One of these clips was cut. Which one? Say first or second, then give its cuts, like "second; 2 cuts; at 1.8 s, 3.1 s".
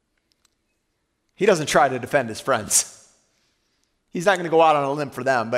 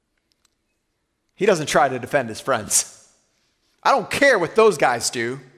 second; 1 cut; at 3.6 s